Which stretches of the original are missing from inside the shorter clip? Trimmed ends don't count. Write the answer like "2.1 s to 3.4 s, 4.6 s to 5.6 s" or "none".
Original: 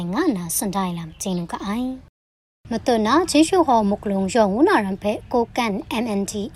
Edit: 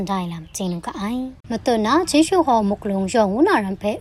2.1 s to 2.6 s

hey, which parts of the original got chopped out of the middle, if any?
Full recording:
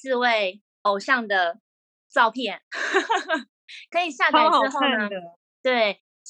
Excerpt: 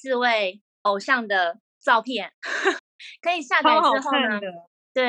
1.7 s to 2.0 s, 3.1 s to 3.5 s

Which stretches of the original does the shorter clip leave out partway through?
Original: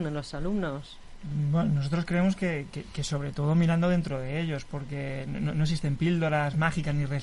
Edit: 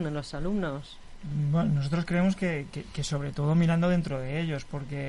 none

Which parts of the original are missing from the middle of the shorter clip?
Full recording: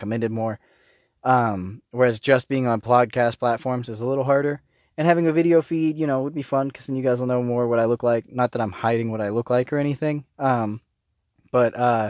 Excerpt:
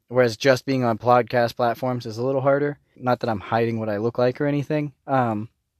4.8 s to 8.3 s

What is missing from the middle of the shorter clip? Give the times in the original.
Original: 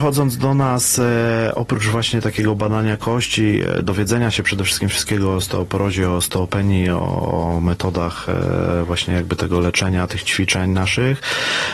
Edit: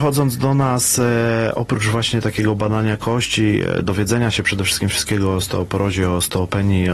none

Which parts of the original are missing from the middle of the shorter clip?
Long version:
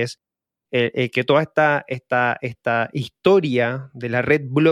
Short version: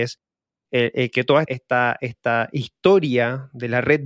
1.4 s to 1.9 s

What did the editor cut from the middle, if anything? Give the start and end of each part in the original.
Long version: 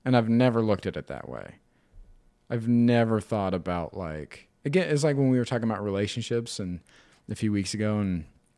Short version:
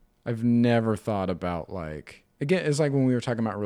none

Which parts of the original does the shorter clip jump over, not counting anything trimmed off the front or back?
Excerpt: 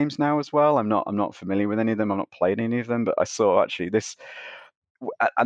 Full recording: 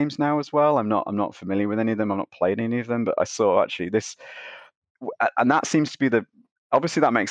none

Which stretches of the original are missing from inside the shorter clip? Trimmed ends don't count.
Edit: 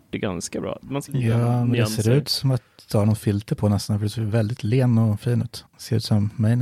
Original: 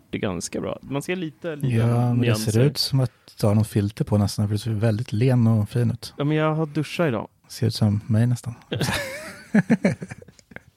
1.1 s to 1.6 s, 6.1 s to 7.4 s

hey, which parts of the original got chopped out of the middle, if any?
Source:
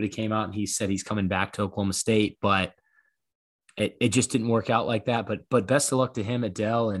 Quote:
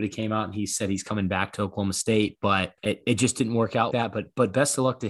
2.8 s to 3.7 s, 4.8 s to 5.0 s

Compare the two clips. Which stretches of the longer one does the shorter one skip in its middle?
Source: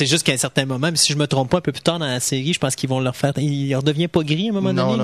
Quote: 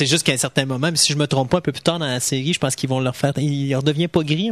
none

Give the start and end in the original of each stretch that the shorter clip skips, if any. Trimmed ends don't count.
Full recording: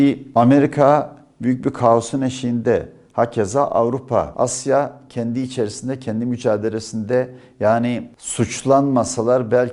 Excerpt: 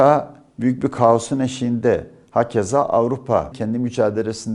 4.3 s to 6.0 s

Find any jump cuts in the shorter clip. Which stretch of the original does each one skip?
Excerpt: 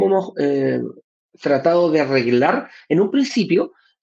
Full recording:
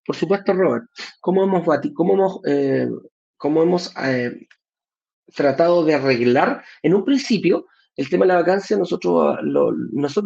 3.3 s to 5.1 s

